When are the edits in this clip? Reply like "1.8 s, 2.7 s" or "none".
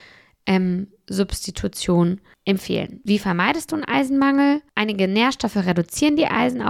none